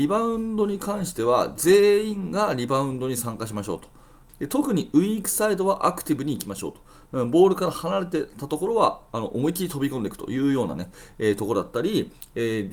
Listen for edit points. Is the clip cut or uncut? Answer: cut